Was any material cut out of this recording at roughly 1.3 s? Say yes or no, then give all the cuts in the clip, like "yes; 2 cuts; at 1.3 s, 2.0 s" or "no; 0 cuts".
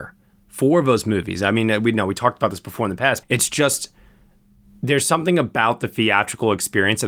no; 1 cut; at 3.2 s